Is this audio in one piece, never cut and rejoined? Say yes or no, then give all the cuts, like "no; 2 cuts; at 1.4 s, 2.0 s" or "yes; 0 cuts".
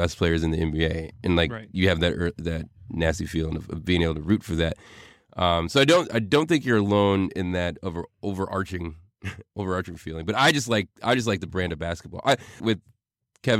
no; 1 cut; at 12.6 s